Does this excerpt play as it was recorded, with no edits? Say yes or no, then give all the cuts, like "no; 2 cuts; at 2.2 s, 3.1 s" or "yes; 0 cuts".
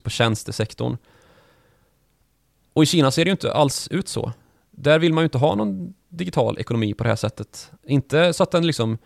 yes; 0 cuts